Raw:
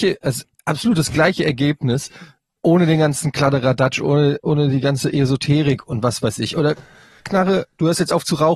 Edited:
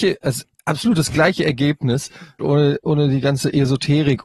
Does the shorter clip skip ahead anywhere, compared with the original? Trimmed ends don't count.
yes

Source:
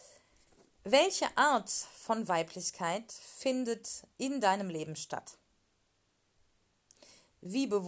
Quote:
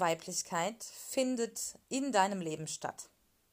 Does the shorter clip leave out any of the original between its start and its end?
no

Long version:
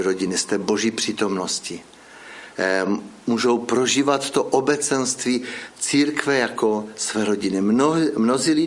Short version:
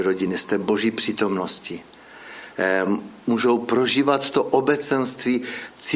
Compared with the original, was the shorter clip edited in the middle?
no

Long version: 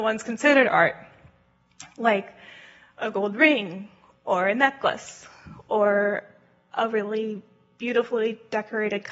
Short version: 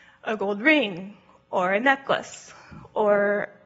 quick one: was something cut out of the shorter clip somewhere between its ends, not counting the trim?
no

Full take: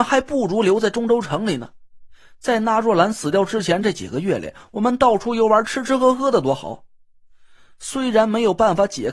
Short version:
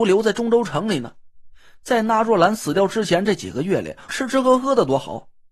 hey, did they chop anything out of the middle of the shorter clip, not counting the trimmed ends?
yes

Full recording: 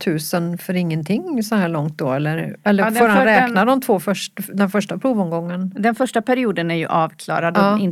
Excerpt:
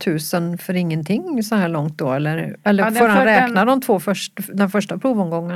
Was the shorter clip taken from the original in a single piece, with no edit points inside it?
yes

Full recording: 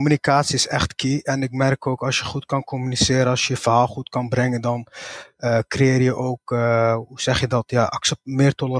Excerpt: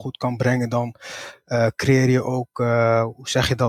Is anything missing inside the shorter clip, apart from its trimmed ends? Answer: no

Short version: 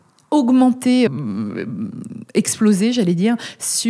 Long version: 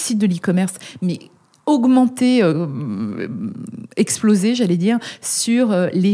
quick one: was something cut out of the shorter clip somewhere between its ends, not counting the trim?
yes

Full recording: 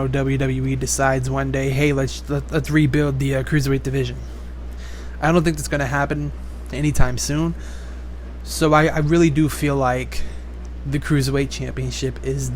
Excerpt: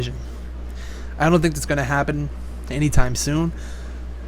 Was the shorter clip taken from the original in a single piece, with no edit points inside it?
yes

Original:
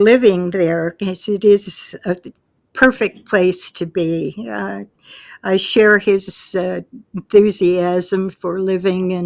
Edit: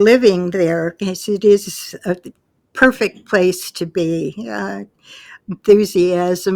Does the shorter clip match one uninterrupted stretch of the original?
no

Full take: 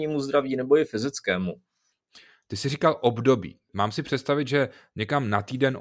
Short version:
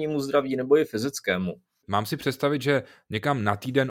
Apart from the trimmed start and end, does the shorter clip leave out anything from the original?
yes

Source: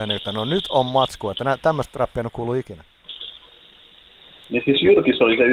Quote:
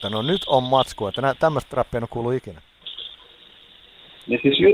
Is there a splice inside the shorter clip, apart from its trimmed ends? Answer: no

